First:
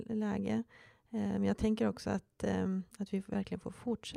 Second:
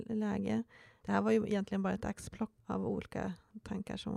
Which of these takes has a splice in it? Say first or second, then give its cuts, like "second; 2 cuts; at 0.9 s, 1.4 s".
second; 2 cuts; at 1.0 s, 2.6 s